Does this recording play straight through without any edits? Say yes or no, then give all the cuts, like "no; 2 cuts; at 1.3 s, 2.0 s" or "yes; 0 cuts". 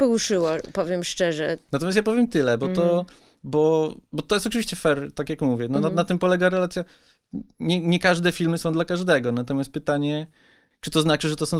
yes; 0 cuts